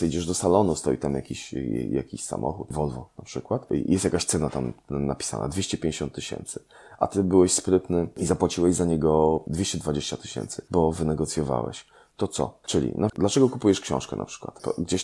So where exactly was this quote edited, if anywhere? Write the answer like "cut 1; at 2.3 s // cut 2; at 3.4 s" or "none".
cut 1; at 12.6 s